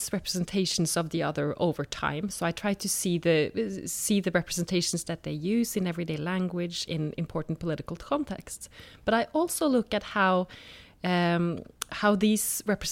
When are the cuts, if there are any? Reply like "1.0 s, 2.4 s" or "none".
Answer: none

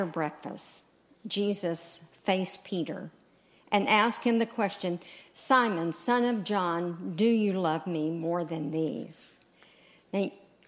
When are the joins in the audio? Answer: none

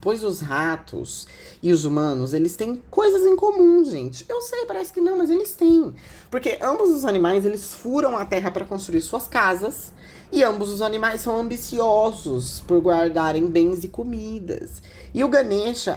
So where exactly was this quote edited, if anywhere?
none

